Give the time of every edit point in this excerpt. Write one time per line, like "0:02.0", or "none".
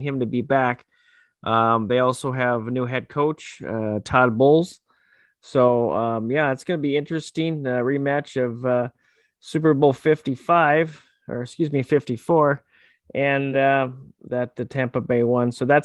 none